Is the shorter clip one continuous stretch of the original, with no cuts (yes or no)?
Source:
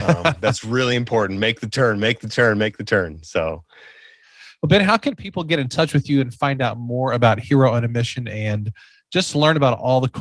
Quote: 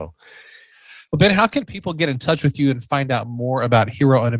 yes